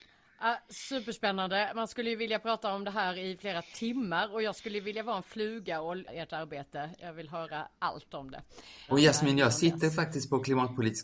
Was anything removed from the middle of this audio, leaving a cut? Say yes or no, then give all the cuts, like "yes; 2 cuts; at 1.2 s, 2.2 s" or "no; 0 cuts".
yes; 2 cuts; at 6.1 s, 8.9 s